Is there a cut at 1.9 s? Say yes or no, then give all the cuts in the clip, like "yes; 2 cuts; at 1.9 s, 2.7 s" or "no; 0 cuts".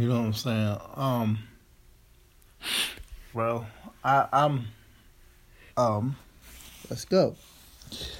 no; 2 cuts; at 3.3 s, 5.7 s